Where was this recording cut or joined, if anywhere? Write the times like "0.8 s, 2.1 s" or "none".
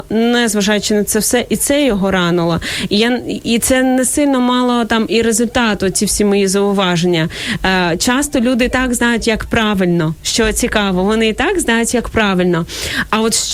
none